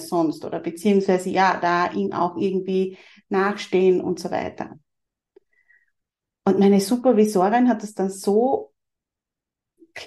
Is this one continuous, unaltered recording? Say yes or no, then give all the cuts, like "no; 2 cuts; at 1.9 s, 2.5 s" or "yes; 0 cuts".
yes; 0 cuts